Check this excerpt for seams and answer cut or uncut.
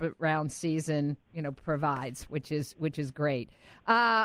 uncut